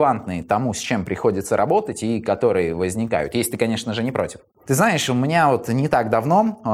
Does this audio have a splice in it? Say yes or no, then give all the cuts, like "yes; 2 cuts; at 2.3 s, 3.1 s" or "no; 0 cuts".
yes; 1 cut; at 4.5 s